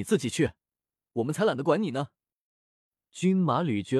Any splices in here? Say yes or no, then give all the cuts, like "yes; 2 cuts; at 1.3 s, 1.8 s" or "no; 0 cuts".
no; 0 cuts